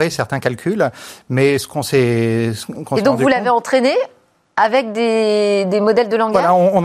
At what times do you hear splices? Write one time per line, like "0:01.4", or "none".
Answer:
none

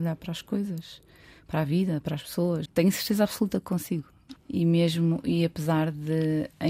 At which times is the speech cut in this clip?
0:02.7
0:04.4

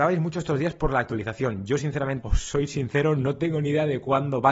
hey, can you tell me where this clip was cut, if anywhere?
0:02.2

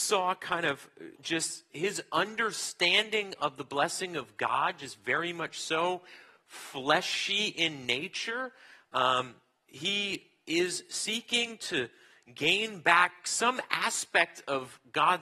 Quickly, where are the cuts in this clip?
0:01.1

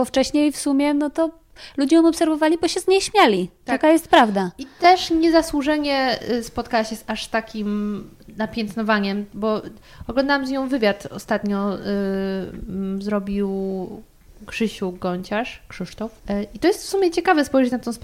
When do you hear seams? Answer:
0:16.2

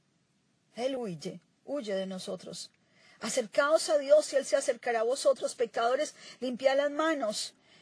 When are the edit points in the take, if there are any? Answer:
none

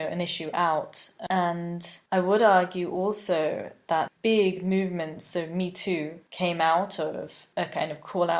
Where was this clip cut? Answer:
none

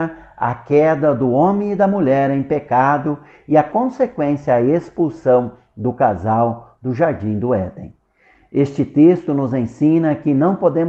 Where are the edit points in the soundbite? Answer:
none

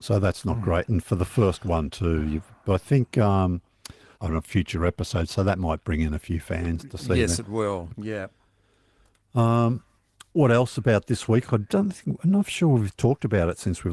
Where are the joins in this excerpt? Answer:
0:04.1
0:07.9
0:11.5

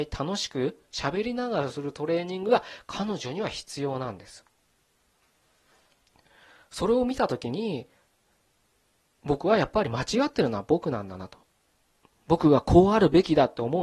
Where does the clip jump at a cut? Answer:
none

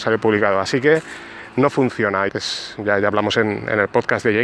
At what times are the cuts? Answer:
0:02.3

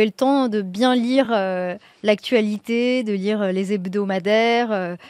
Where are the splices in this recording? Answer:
none

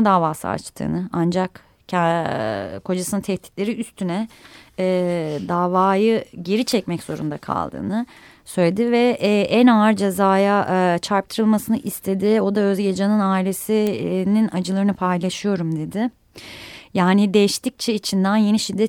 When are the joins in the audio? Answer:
none

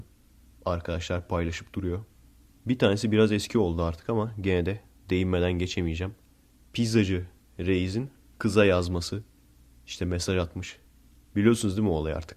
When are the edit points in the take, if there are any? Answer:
none

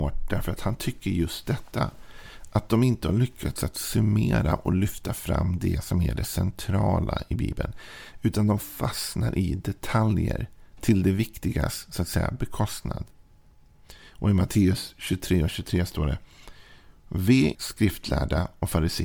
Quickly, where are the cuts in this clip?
0:17.5

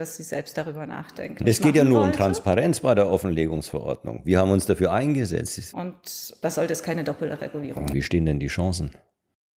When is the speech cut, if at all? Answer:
0:01.4
0:05.7
0:07.9

